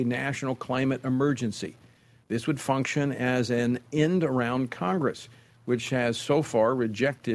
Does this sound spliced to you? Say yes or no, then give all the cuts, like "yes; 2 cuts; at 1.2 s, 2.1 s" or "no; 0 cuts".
no; 0 cuts